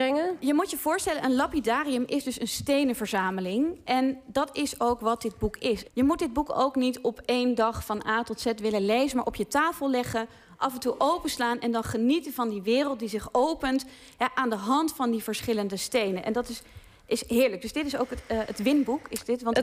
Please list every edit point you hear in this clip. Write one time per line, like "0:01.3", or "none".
0:05.8